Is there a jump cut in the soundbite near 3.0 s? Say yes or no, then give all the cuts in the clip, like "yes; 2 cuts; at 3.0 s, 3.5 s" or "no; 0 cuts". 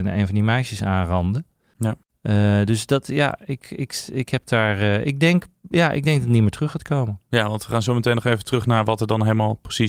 no; 0 cuts